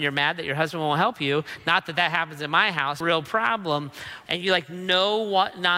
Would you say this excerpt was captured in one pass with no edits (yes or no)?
no